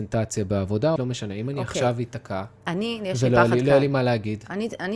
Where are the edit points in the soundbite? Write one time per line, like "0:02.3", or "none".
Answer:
0:01.0

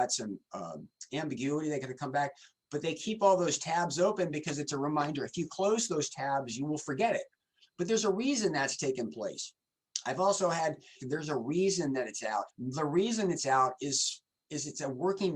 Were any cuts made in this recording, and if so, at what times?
0:11.0
0:12.5

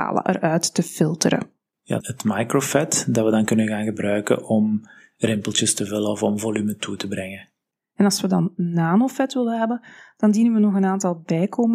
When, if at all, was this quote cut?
0:02.0

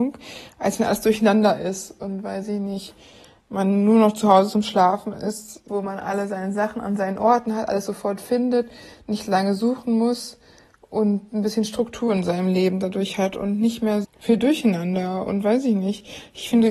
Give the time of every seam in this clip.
0:05.7
0:14.0

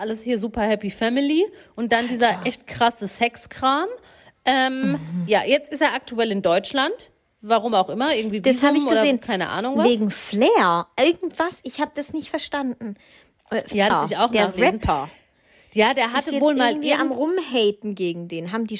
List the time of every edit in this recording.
0:13.9

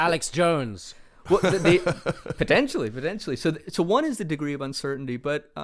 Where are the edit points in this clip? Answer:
none

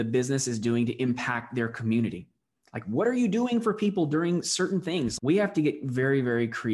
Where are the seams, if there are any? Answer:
0:05.2

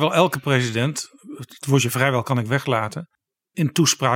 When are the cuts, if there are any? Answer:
none

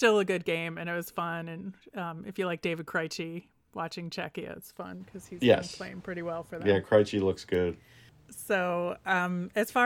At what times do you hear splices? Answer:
none

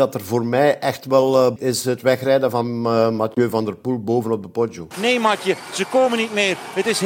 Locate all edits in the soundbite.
0:01.6
0:04.9

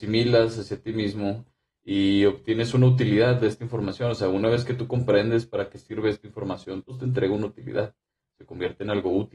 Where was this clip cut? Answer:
none

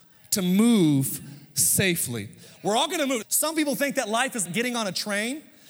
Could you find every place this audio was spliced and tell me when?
0:03.2
0:04.4

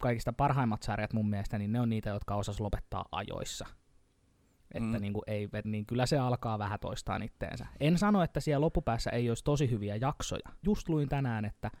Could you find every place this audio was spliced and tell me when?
0:05.6
0:10.6

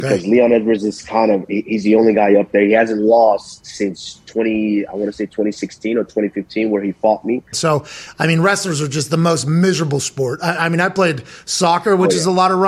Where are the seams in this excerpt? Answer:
0:07.5

